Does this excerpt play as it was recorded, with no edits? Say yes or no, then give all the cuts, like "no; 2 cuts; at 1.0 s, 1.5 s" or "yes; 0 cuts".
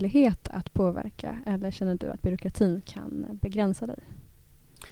yes; 0 cuts